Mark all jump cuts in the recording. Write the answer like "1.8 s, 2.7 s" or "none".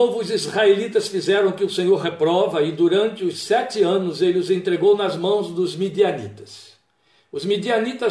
none